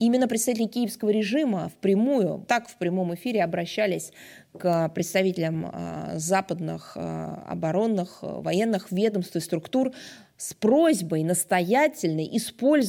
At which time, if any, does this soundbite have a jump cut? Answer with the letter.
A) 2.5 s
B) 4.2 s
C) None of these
A